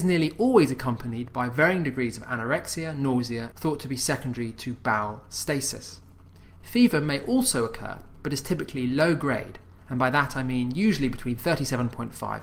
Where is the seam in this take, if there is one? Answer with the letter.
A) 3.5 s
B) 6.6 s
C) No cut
A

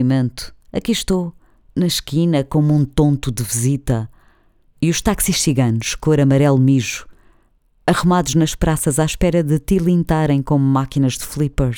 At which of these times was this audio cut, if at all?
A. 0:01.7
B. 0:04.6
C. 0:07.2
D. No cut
B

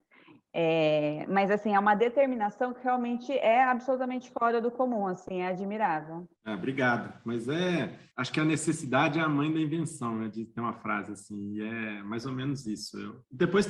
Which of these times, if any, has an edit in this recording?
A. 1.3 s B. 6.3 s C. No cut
C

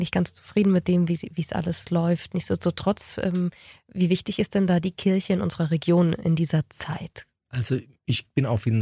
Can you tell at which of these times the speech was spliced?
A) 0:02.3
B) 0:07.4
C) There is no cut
B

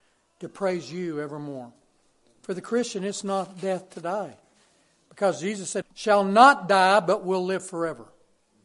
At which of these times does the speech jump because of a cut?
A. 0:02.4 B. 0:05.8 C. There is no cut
B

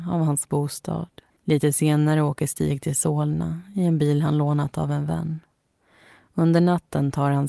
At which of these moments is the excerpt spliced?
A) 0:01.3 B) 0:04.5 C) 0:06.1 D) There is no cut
A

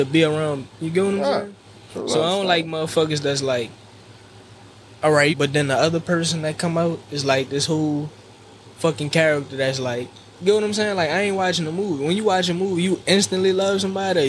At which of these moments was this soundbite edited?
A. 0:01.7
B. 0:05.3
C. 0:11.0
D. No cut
B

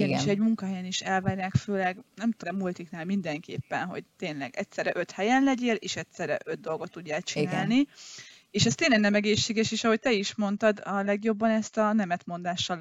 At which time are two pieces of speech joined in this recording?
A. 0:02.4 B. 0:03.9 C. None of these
A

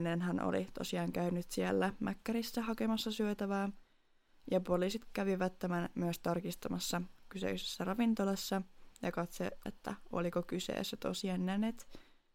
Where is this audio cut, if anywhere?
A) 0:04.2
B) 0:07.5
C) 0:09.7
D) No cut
C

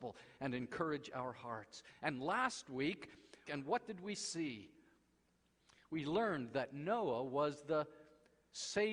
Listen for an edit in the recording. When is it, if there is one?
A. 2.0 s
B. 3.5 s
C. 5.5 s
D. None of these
B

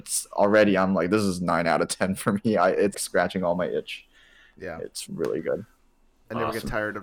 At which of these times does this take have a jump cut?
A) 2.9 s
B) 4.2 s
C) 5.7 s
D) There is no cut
A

